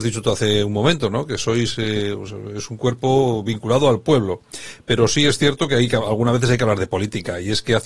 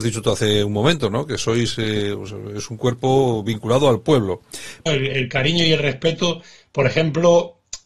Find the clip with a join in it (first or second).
second